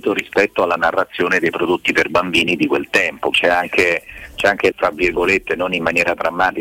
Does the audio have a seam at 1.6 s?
no; 2 cuts; at 3.3 s, 4.7 s

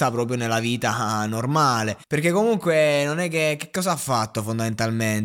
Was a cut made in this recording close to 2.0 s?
yes; 1 cut; at 2.0 s

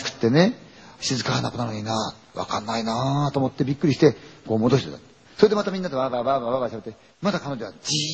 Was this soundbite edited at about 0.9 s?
no; 2 cuts; at 5.2 s, 7.1 s

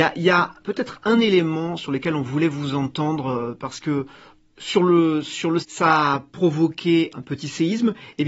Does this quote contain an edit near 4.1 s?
no; 2 cuts; at 5.6 s, 7.1 s

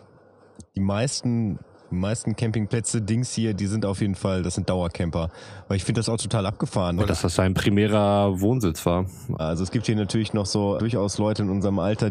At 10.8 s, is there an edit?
yes; 3 cuts; at 7.0 s, 9.4 s, 10.8 s

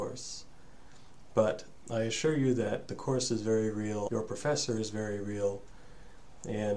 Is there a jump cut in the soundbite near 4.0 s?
yes; 1 cut; at 4.0 s

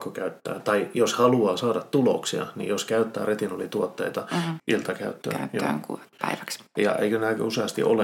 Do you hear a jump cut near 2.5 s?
no; 1 cut; at 4.6 s

